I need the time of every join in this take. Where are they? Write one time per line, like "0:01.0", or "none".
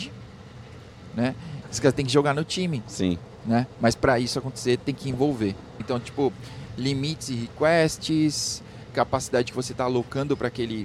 0:01.6
0:05.8
0:08.9